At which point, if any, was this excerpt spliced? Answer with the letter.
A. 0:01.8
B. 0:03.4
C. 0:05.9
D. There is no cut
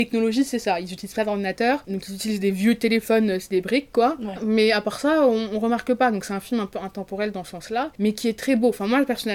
D